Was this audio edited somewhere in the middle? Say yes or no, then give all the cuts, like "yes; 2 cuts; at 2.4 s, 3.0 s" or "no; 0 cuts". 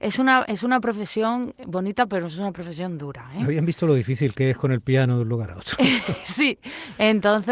no; 0 cuts